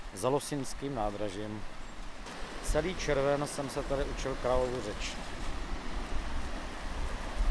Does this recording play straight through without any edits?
yes; 0 cuts

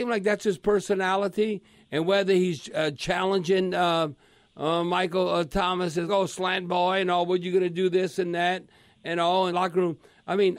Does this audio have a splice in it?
yes; 2 cuts; at 6.1 s, 9.5 s

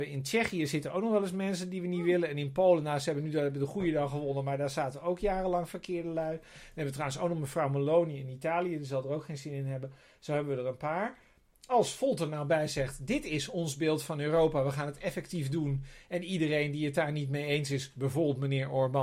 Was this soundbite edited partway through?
no; 0 cuts

